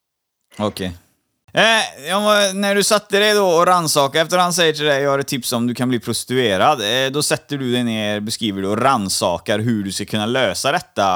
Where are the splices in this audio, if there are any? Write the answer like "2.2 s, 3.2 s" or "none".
1.4 s